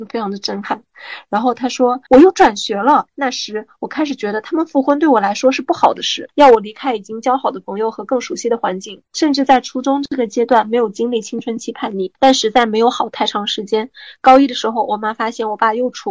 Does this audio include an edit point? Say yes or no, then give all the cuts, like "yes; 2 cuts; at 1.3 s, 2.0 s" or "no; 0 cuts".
yes; 2 cuts; at 2.1 s, 9.0 s